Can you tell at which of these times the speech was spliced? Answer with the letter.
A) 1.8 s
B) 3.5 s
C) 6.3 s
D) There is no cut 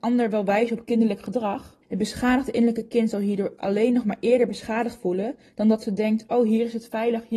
A